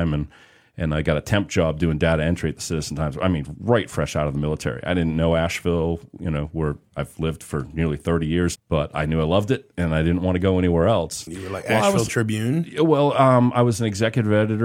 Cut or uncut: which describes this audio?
cut